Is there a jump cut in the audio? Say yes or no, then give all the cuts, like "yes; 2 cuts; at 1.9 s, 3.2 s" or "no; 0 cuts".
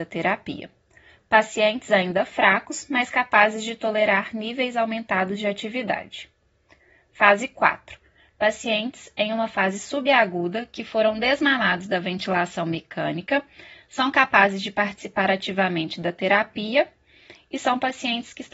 no; 0 cuts